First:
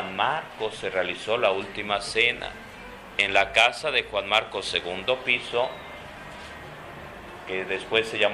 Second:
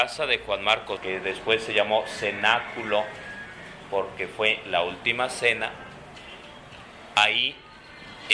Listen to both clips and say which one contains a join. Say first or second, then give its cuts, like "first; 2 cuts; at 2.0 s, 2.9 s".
second; 1 cut; at 1.0 s